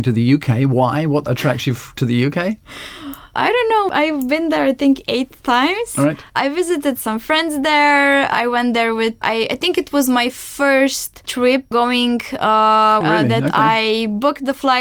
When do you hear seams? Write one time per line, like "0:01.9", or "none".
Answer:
0:09.2
0:13.0